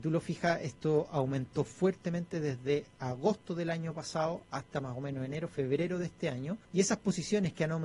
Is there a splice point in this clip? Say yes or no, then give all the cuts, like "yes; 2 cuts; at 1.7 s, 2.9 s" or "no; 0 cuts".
yes; 1 cut; at 6.6 s